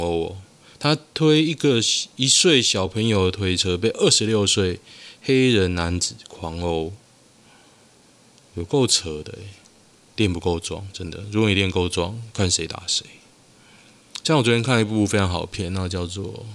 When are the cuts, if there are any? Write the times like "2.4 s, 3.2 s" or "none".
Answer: none